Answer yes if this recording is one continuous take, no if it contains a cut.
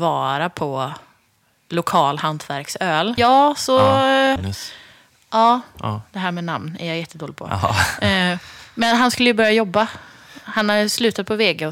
no